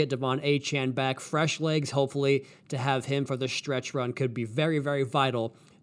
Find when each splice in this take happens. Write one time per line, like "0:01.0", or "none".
none